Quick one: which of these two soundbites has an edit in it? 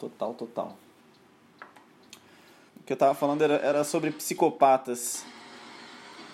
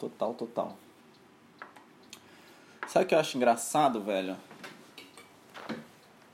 first; 1 cut; at 2.7 s

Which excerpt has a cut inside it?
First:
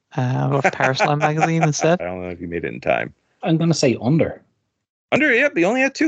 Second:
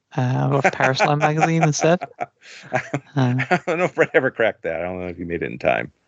first; 2 cuts; at 2.0 s, 3.4 s

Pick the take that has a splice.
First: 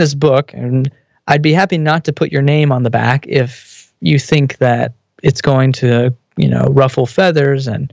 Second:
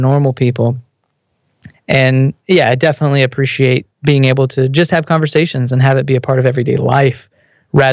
second; 2 cuts; at 1.7 s, 3.9 s

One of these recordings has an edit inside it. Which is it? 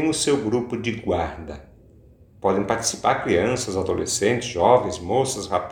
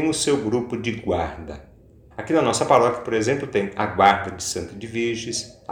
second; 1 cut; at 2.1 s

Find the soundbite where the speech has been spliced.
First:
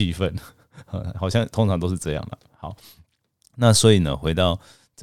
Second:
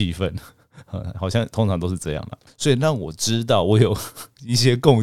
second; 1 cut; at 2.5 s

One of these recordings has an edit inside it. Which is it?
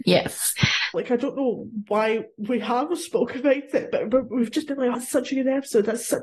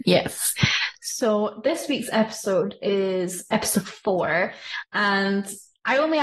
first; 2 cuts; at 0.9 s, 4.9 s

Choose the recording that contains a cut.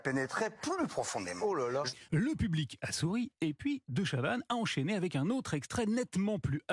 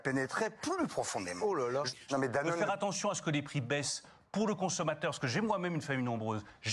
second; 1 cut; at 2.1 s

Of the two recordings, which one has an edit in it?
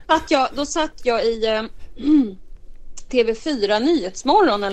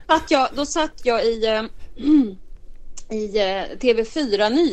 first; 1 cut; at 3.1 s

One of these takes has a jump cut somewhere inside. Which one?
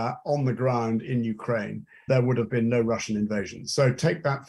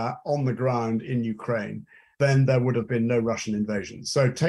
first; 1 cut; at 2.1 s

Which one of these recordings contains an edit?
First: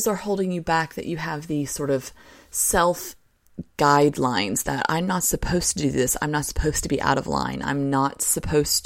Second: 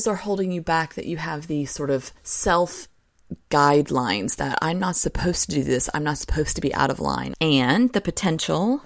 second; 2 cuts; at 2.2 s, 7.3 s

